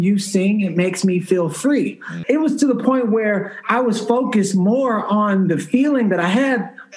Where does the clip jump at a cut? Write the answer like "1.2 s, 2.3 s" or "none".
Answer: 2.2 s